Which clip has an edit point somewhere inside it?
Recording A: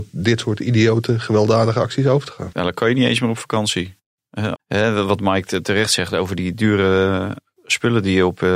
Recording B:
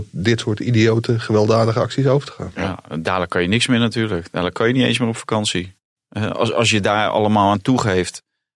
A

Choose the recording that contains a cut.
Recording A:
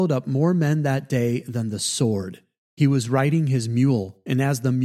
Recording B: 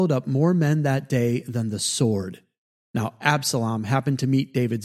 A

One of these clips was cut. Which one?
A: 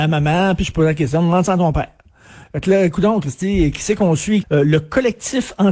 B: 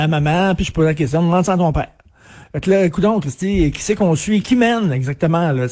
A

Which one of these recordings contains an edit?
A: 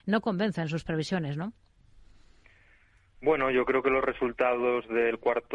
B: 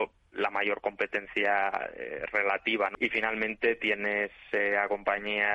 B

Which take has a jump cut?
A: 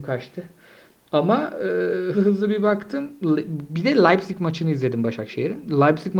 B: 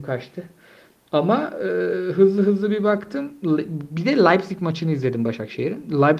A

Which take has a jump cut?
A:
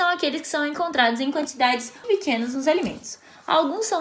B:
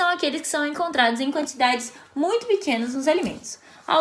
A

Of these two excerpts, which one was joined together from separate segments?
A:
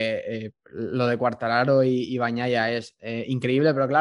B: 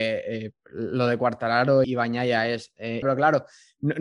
B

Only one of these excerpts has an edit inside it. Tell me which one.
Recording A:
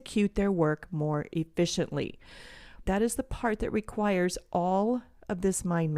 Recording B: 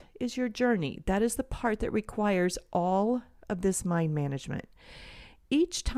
A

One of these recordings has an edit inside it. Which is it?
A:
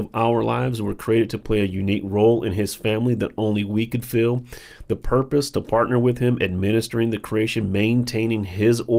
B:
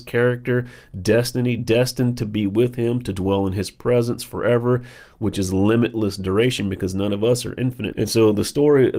B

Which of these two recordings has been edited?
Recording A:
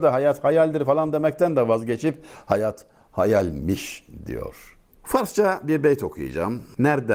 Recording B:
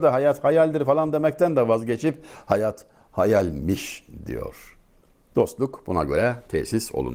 A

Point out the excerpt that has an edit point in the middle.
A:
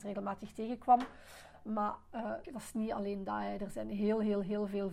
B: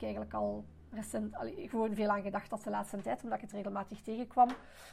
A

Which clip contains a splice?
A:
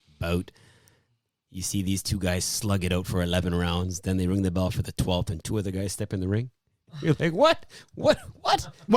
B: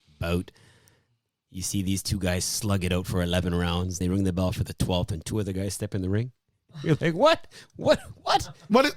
B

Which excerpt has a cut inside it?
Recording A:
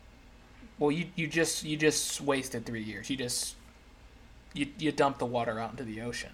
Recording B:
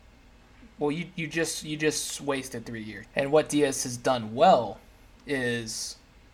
B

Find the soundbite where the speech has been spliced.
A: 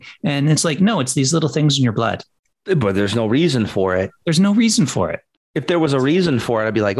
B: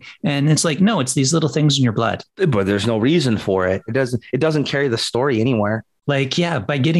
B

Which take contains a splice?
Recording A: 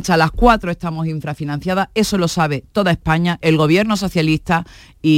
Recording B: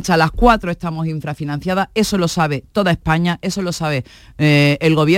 A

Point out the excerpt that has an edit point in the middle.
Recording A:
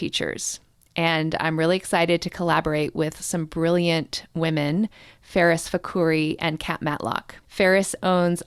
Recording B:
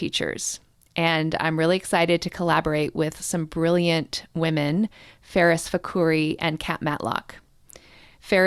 A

